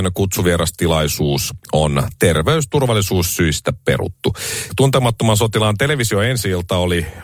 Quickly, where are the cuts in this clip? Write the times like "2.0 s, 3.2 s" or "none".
4.7 s